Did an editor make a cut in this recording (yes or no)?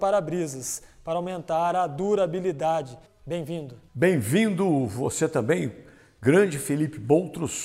yes